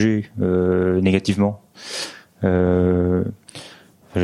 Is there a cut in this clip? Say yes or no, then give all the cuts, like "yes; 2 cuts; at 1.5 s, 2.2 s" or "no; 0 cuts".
no; 0 cuts